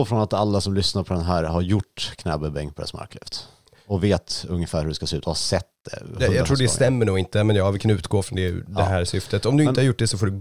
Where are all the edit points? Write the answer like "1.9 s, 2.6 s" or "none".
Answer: none